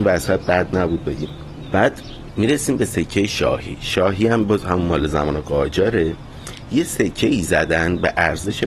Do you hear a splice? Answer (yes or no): no